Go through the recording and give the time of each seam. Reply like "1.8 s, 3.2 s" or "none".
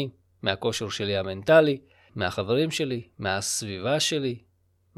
2.1 s